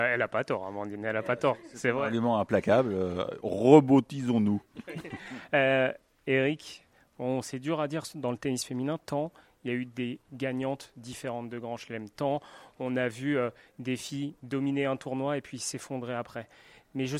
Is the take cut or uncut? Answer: uncut